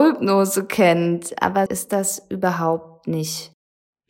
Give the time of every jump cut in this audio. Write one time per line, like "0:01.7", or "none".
0:01.7